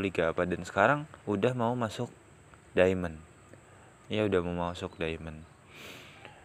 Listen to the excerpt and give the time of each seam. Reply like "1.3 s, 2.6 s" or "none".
1.2 s